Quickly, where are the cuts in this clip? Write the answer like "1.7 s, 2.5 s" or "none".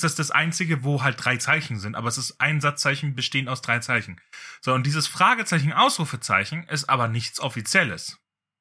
none